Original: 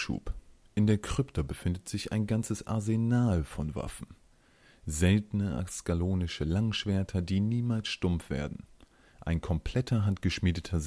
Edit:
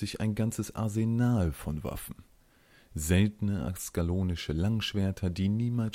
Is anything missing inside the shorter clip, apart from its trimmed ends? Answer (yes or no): no